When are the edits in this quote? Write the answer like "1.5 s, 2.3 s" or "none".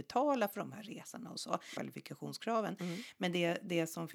1.8 s